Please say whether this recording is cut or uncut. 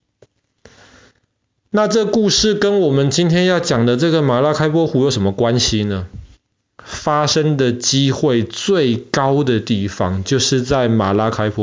cut